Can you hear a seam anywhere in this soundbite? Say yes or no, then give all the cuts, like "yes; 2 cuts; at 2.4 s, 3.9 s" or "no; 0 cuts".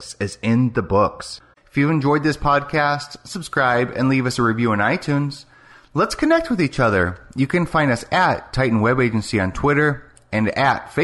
no; 0 cuts